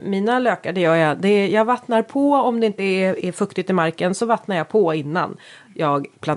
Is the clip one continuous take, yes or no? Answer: yes